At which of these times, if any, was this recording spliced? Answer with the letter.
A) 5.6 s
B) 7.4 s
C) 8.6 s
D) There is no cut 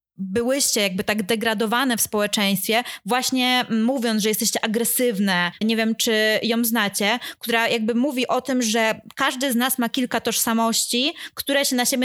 A